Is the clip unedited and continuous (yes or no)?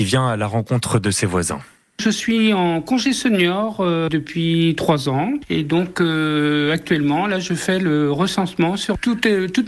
yes